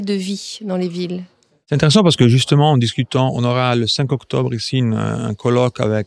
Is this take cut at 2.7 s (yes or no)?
no